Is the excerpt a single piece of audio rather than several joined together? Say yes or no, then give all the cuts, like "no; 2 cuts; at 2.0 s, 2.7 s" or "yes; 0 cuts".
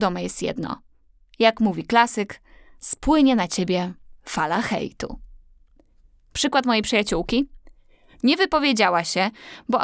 yes; 0 cuts